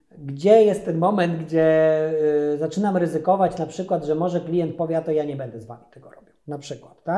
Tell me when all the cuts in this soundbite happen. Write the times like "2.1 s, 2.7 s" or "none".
none